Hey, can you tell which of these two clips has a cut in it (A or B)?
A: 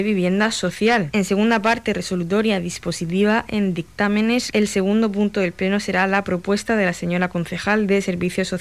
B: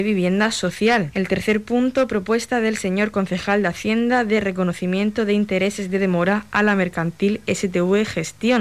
A